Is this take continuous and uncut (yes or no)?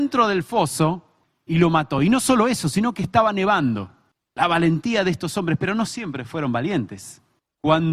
yes